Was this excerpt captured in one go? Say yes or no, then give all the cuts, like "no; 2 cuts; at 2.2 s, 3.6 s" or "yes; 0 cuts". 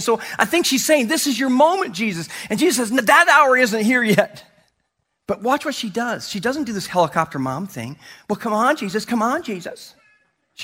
yes; 0 cuts